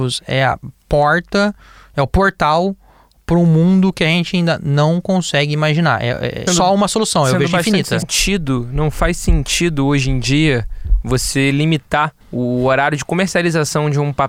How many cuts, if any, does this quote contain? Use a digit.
3